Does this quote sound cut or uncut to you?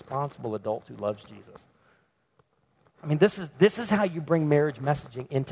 uncut